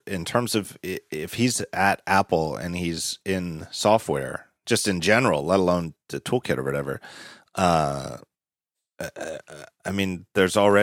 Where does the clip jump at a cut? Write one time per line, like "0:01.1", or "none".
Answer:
none